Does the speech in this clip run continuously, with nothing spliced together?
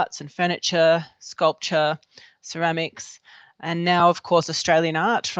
yes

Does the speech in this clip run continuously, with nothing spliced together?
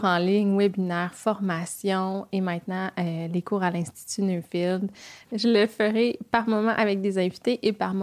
no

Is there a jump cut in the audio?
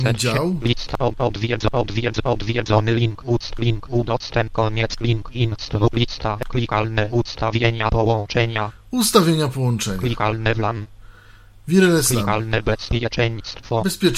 no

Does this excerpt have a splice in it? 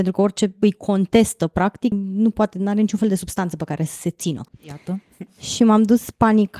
yes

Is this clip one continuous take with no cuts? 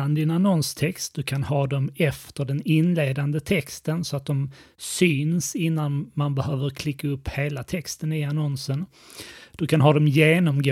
yes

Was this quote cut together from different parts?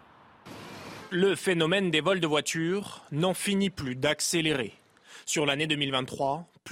no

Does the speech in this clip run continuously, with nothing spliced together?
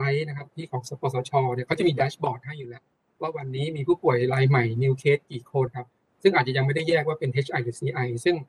no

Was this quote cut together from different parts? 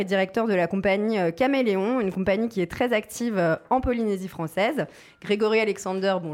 no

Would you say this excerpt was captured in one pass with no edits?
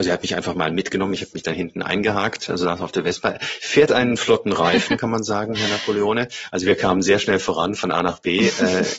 yes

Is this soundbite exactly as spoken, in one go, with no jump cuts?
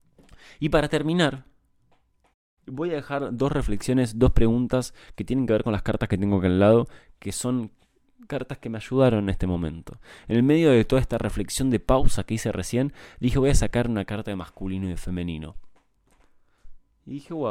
yes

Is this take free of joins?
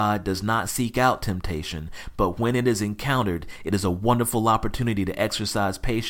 yes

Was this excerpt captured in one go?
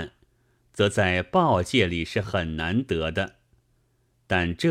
yes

